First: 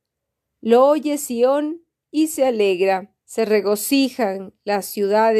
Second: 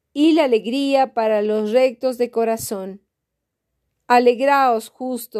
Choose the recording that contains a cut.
first; 1 cut; at 3.2 s

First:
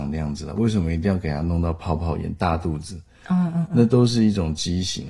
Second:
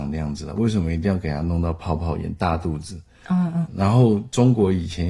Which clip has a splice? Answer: second; 1 cut; at 3.7 s

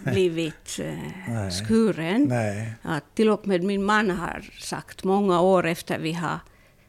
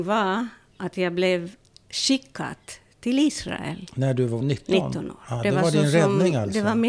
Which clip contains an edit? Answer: second; 1 cut; at 4.4 s

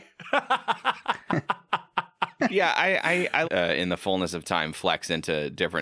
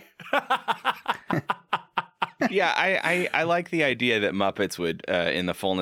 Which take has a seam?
first; 1 cut; at 3.4 s

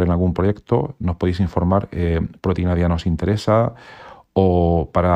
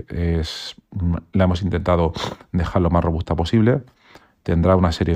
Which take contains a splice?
first; 1 cut; at 2.4 s

